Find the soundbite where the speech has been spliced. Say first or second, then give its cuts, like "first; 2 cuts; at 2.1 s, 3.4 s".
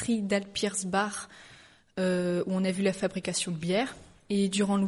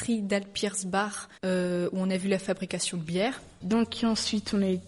second; 2 cuts; at 1.4 s, 3.6 s